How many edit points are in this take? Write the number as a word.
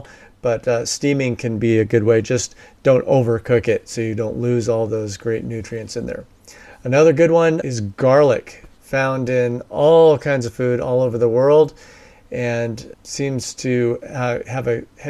two